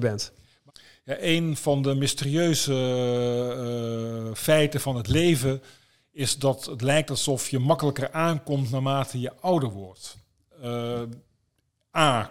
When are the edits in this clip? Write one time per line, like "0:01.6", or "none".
none